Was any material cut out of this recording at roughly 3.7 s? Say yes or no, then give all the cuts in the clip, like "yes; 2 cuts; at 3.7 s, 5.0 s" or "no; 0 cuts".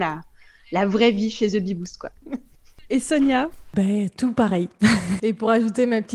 no; 2 cuts; at 2.2 s, 5.2 s